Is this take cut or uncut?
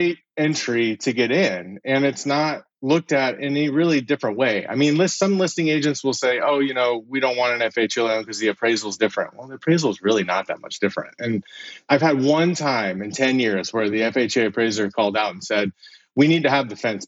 uncut